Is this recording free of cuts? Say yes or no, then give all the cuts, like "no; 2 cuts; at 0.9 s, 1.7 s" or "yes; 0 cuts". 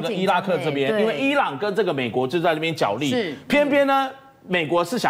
yes; 0 cuts